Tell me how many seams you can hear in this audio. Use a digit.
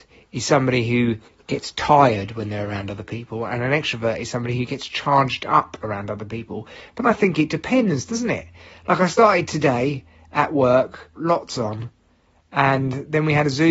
1